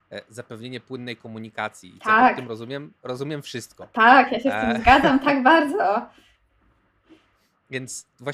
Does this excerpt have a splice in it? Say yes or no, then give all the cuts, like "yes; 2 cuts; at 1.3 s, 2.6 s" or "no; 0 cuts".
no; 0 cuts